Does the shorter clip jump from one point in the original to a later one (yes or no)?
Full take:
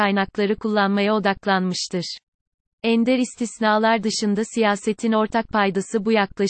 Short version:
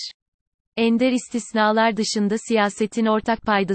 no